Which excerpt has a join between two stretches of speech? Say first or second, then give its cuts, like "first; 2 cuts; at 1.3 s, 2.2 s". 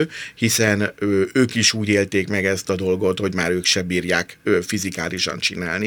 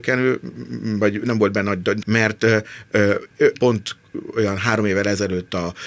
second; 2 cuts; at 2.0 s, 3.5 s